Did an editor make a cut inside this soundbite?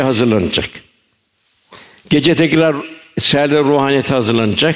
no; 0 cuts

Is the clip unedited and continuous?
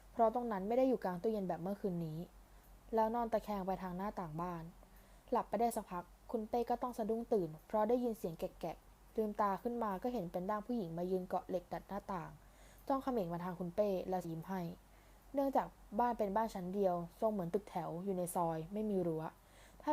no; 1 cut; at 14.2 s

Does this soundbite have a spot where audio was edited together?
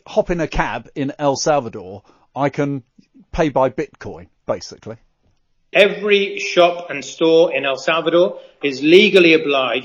yes; 2 cuts; at 5.7 s, 8.6 s

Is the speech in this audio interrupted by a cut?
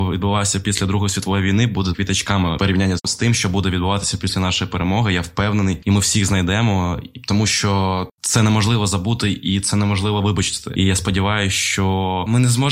yes; 2 cuts; at 1.9 s, 5.8 s

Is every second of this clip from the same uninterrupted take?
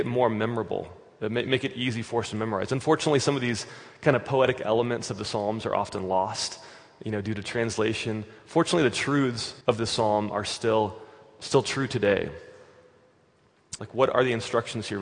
no; 2 cuts; at 9.6 s, 13.8 s

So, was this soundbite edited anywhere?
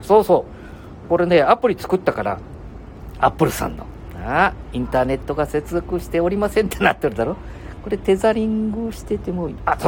no; 0 cuts

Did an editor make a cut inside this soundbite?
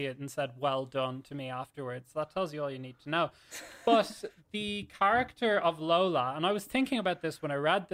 no; 0 cuts

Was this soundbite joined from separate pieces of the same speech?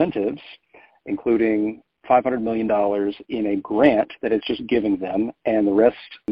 no; 0 cuts

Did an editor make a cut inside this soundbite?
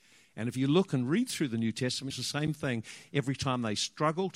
yes; 1 cut; at 2.1 s

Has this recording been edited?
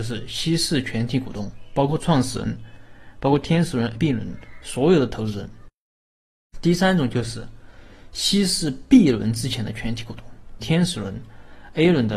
yes; 2 cuts; at 4.0 s, 10.6 s

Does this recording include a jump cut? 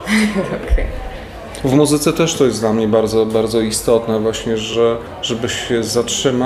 no; 0 cuts

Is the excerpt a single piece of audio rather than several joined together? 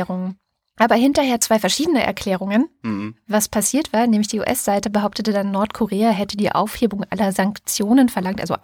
yes; 0 cuts

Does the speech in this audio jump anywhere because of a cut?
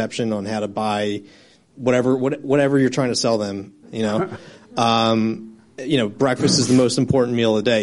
yes; 1 cut; at 3.8 s

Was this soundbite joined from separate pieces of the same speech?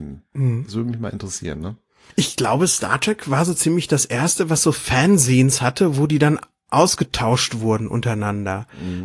no; 0 cuts

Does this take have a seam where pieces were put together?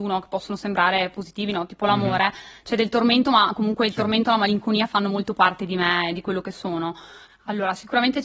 yes; 1 cut; at 7.3 s

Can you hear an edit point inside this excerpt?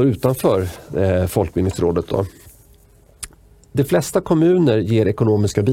no; 0 cuts

